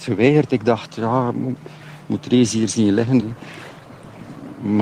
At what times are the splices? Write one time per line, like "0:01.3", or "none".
0:03.2